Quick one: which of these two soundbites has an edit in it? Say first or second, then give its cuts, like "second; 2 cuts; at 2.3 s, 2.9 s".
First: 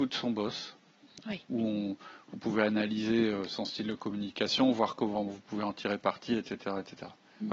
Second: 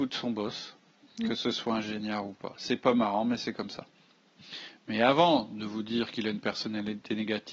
first; 1 cut; at 1.2 s